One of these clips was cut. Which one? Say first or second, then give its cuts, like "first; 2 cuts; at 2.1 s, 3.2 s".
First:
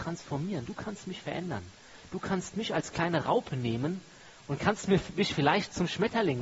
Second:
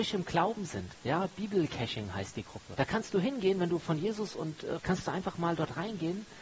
second; 2 cuts; at 2.7 s, 4.8 s